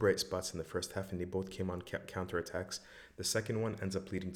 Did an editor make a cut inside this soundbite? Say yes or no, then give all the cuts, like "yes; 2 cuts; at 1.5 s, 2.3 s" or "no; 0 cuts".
no; 0 cuts